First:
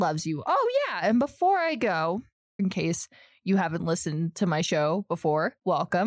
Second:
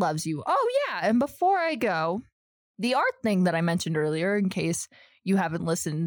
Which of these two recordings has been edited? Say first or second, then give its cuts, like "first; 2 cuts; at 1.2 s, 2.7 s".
first; 1 cut; at 2.6 s